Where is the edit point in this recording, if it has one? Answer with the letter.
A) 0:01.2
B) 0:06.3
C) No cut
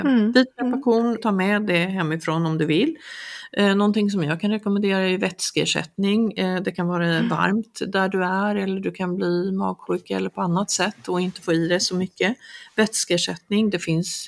A